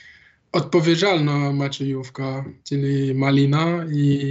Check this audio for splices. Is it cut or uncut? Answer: cut